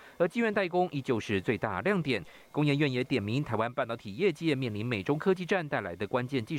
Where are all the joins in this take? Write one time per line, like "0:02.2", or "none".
none

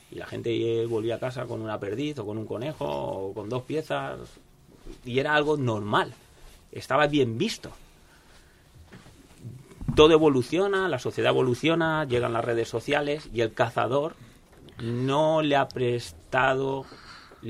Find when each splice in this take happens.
none

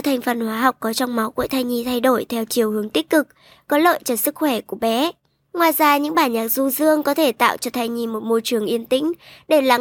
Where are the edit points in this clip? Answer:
0:05.5

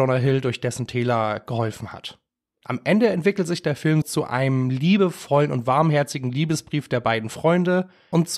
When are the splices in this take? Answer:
0:04.0

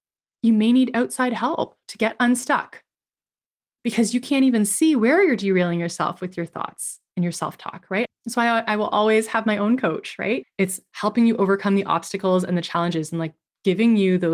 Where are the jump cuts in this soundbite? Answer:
0:08.0
0:10.4

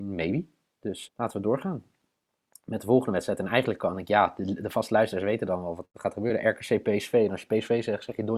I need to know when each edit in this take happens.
0:01.1

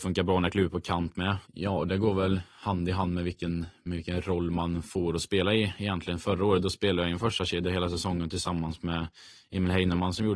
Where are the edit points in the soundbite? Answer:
0:01.4

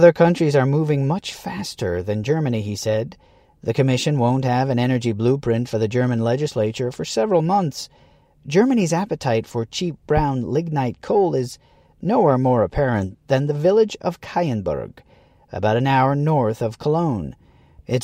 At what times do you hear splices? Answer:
none

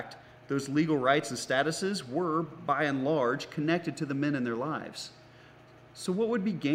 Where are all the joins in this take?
none

